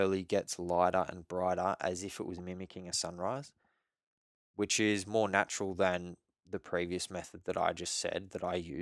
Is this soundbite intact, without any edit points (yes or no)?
yes